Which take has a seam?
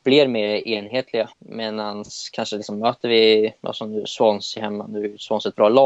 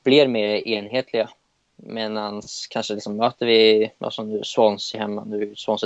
first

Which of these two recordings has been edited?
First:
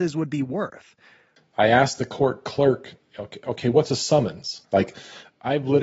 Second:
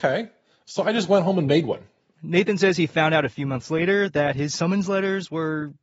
first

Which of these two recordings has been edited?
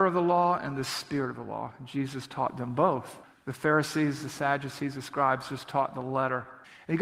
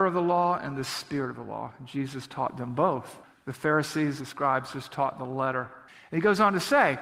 second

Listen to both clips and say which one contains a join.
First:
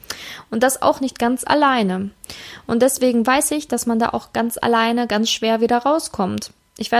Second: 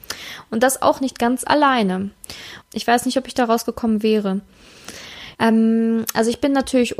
second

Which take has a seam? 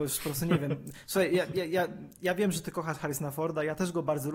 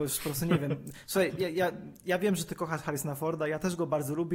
second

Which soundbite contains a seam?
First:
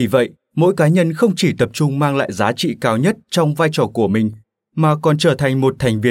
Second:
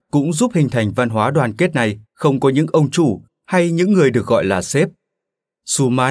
second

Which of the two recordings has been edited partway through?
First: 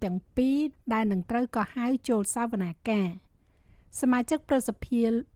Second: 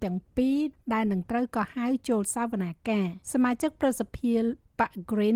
second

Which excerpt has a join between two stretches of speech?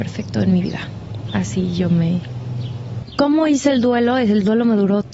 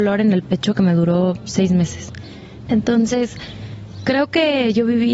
second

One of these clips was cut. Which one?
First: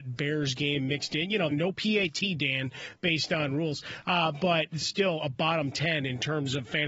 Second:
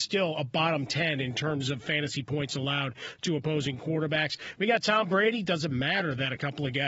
first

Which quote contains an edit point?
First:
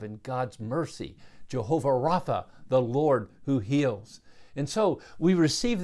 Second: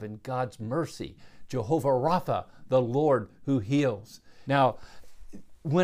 second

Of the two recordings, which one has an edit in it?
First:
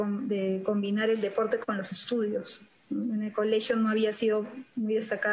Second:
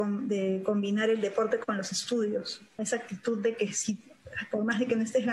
second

